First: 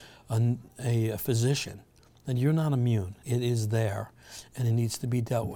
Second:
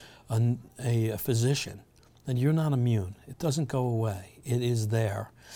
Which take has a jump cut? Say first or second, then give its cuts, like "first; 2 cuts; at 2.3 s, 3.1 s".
first; 1 cut; at 3.2 s